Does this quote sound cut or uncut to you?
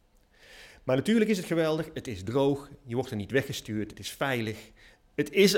uncut